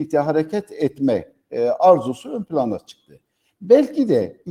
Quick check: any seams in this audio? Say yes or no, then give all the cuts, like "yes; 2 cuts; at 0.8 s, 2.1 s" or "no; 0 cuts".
no; 0 cuts